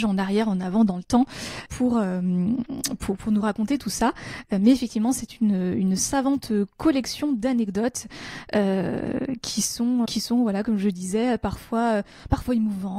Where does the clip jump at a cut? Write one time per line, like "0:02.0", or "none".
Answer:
0:01.7
0:10.0